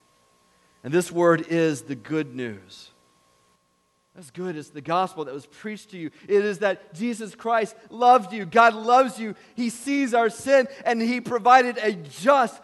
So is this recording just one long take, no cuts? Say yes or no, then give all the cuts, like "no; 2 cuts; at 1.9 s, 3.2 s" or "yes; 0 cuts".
yes; 0 cuts